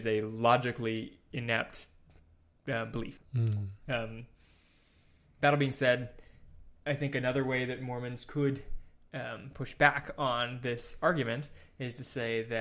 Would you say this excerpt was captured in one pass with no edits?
no; 1 cut; at 3.2 s

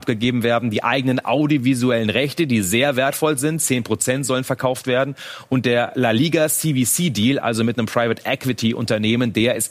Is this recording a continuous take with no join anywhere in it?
yes; 0 cuts

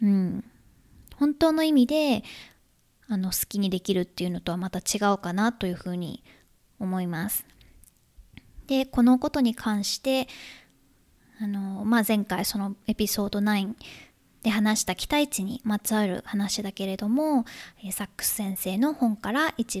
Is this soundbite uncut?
yes; 0 cuts

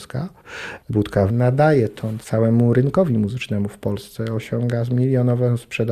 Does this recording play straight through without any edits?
yes; 0 cuts

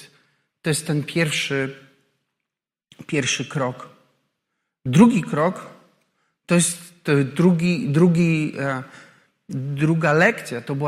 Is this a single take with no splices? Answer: yes; 0 cuts

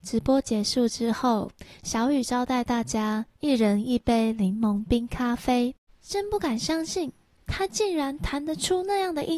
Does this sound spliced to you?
yes; 1 cut; at 5.9 s

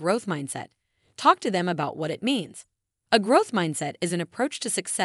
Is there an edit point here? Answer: yes; 1 cut; at 3.1 s

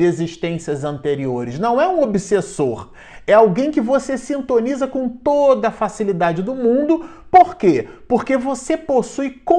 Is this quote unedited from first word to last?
yes; 0 cuts

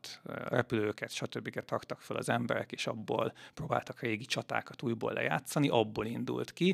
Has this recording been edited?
no; 0 cuts

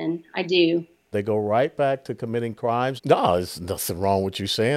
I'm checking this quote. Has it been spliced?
yes; 2 cuts; at 1.1 s, 3.0 s

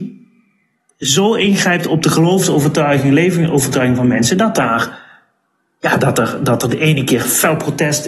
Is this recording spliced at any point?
no; 0 cuts

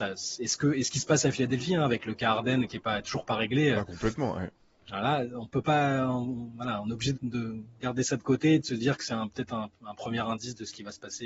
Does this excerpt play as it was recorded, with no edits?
no; 1 cut; at 7.1 s

